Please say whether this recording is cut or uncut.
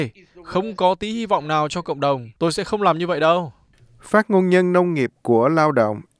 cut